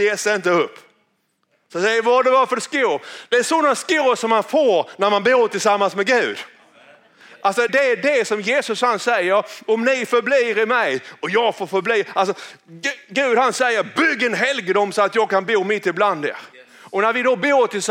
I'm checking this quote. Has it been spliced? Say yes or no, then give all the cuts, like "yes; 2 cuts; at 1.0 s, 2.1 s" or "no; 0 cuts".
yes; 1 cut; at 7.7 s